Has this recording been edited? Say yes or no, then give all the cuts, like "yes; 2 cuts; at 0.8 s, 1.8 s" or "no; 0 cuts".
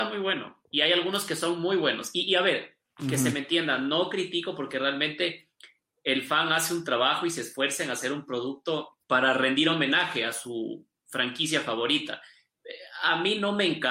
yes; 1 cut; at 9.0 s